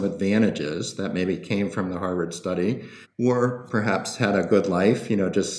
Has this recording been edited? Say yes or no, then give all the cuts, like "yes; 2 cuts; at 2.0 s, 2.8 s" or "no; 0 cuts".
yes; 1 cut; at 3.0 s